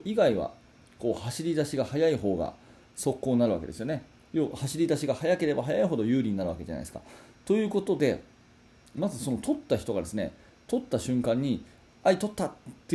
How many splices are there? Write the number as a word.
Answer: zero